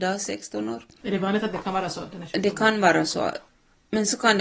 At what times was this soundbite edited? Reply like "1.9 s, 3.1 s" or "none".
1.0 s